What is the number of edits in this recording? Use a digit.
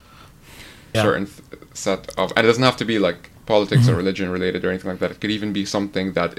2